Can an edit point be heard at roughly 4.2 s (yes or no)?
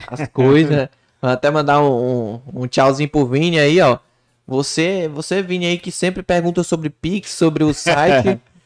no